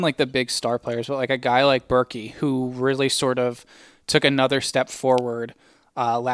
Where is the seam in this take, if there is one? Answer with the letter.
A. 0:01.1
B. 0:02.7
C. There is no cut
C